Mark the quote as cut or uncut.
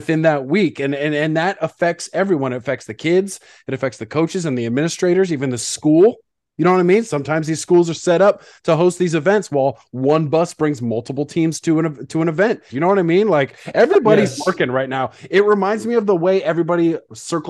cut